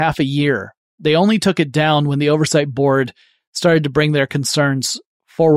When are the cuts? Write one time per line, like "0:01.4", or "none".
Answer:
none